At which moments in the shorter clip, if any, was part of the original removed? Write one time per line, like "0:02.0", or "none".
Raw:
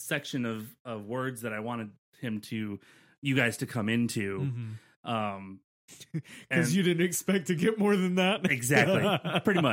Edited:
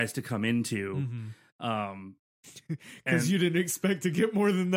none